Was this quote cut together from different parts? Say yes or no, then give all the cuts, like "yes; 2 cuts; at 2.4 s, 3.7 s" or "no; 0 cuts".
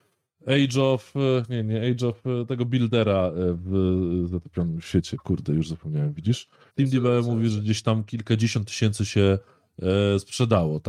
yes; 1 cut; at 6.7 s